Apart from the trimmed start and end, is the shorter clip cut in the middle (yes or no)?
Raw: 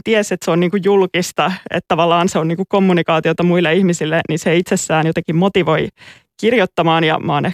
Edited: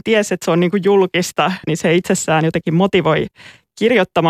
yes